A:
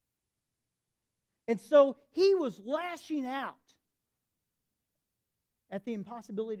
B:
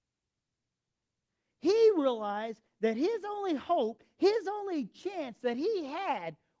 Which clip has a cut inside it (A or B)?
A